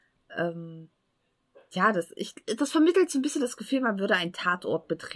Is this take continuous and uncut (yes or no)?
yes